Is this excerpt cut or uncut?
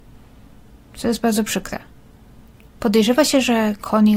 uncut